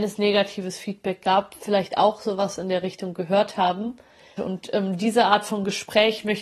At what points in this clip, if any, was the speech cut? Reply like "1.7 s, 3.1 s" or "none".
4.4 s